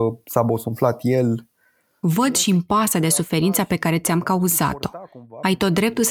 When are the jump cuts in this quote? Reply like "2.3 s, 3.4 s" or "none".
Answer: none